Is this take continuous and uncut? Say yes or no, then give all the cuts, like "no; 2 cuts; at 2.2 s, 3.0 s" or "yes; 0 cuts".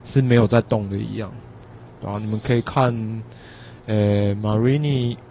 yes; 0 cuts